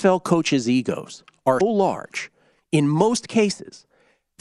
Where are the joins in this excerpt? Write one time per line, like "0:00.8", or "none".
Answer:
0:01.6